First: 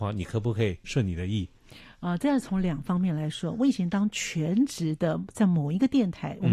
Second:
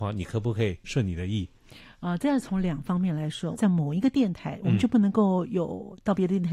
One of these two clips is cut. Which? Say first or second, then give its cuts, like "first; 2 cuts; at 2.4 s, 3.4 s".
second; 1 cut; at 3.5 s